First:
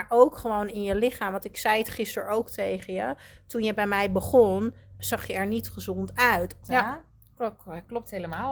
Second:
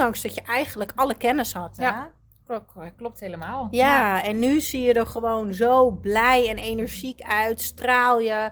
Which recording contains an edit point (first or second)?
first